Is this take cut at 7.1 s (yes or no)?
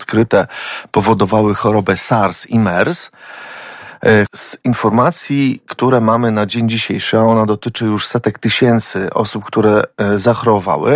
no